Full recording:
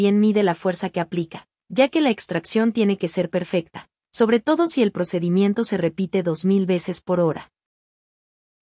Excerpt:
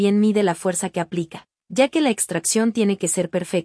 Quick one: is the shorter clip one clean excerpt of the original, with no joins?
yes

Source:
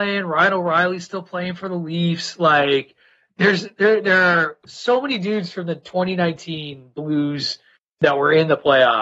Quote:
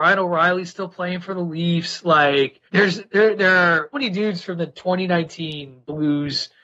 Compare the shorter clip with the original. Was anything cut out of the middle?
yes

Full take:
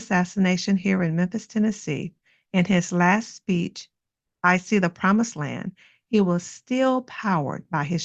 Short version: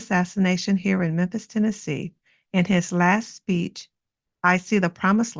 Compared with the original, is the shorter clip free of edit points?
yes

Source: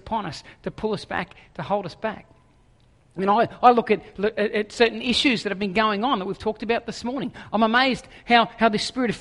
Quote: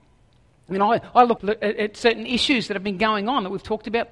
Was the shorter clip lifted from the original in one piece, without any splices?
no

